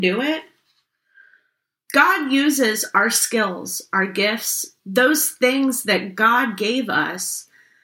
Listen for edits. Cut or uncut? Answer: cut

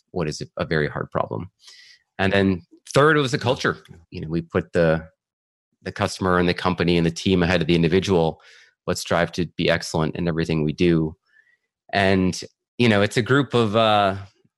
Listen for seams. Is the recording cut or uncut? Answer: cut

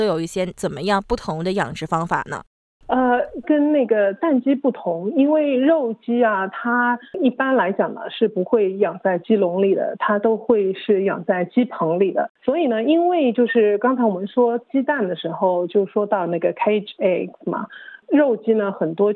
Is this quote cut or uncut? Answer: cut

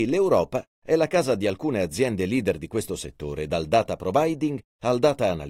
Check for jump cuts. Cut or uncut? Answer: uncut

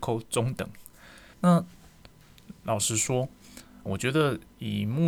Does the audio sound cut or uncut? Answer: cut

